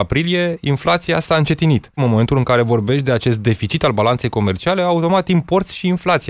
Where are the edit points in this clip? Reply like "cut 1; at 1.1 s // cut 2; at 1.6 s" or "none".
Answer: cut 1; at 2.0 s